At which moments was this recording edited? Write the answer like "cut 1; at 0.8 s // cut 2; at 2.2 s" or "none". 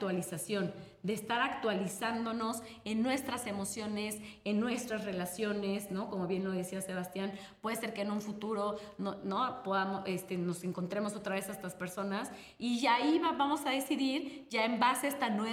none